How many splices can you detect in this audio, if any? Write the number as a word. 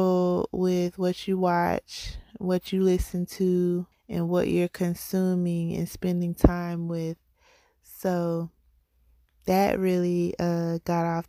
one